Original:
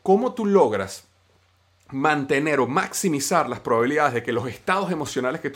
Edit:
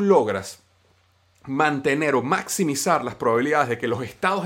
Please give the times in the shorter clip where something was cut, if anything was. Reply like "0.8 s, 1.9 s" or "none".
none